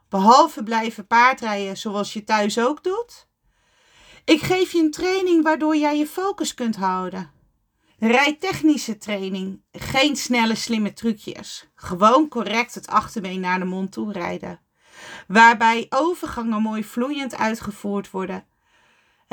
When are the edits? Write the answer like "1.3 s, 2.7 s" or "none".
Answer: 7.9 s